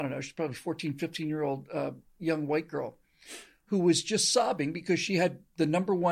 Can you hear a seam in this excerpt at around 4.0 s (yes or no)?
no